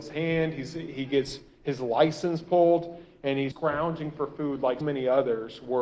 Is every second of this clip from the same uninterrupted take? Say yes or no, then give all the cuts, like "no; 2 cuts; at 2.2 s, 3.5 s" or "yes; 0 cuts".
no; 2 cuts; at 3.5 s, 4.8 s